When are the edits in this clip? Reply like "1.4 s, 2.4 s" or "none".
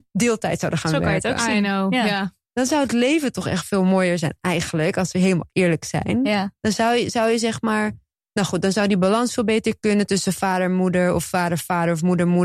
none